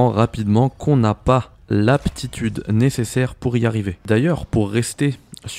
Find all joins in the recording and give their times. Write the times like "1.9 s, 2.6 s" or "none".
none